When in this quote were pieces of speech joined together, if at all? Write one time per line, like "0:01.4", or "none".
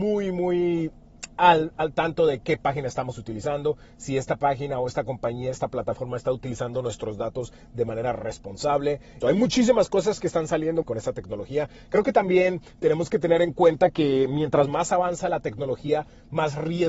0:09.2
0:10.8